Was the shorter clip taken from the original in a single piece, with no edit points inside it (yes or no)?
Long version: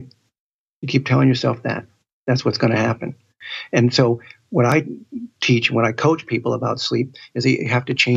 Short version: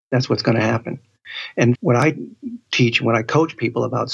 no